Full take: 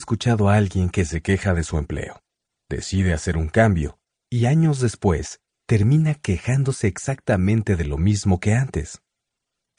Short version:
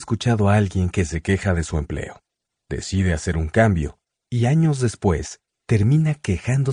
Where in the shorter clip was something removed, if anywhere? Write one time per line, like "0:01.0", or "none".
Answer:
none